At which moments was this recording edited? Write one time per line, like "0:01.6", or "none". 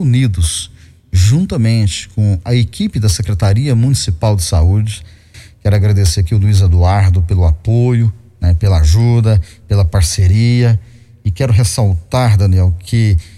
none